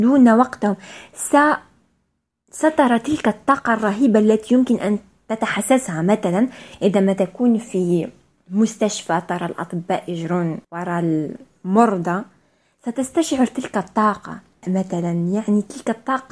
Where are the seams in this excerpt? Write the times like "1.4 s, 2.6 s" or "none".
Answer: 10.6 s